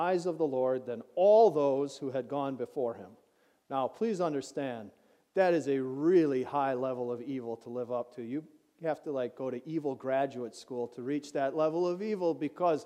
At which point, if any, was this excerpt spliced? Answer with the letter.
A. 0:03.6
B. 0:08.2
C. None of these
C